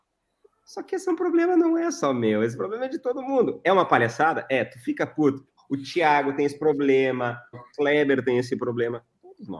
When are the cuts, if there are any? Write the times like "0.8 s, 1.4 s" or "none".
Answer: 5.6 s, 7.5 s